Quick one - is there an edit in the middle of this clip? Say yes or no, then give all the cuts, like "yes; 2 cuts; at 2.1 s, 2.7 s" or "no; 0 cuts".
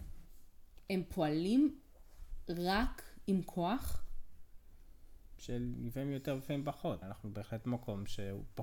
yes; 2 cuts; at 5.4 s, 7.0 s